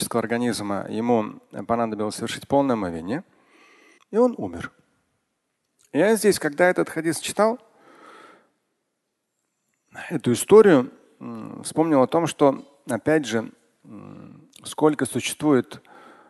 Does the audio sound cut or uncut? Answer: cut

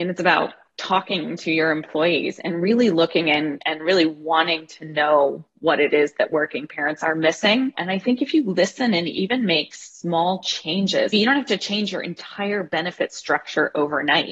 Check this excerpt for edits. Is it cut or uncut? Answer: cut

